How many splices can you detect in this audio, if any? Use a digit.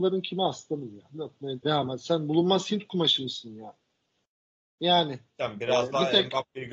1